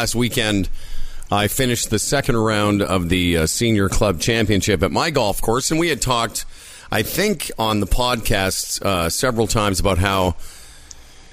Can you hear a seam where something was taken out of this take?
no; 0 cuts

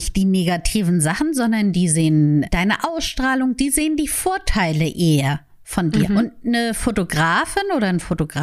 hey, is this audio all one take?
yes; 0 cuts

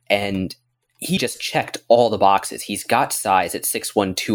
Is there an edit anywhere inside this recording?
yes; 1 cut; at 1.2 s

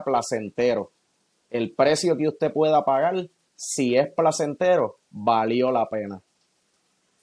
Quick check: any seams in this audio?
no; 0 cuts

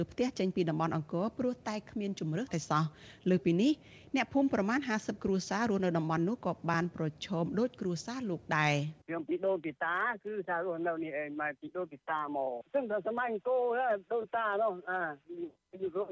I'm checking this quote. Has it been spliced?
yes; 2 cuts; at 2.5 s, 9.0 s

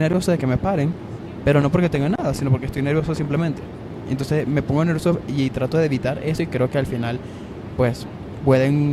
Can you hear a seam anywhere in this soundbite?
no; 0 cuts

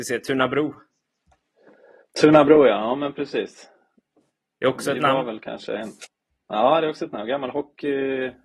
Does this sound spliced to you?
no; 0 cuts

